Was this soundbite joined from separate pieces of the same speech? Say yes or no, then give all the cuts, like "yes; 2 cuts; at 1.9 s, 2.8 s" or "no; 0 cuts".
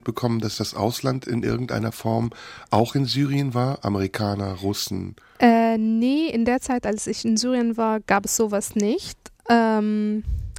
no; 0 cuts